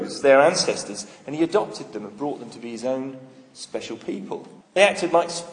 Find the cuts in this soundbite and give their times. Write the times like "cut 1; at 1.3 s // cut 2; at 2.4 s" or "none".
cut 1; at 4.6 s